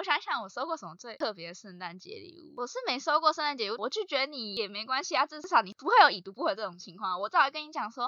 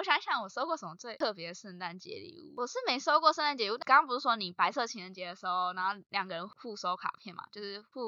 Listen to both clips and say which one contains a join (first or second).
first